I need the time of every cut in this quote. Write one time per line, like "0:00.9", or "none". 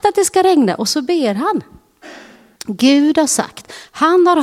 0:02.6